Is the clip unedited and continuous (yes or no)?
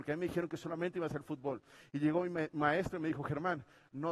yes